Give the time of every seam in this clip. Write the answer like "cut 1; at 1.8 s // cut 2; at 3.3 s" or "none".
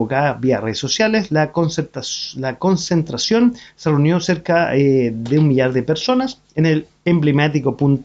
none